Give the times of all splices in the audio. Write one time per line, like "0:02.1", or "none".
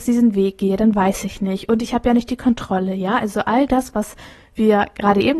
none